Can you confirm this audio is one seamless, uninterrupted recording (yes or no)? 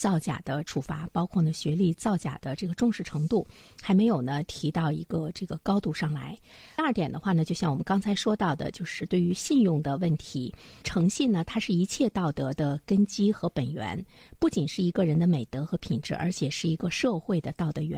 yes